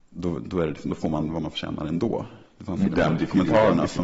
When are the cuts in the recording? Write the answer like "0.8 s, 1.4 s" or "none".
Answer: 2.8 s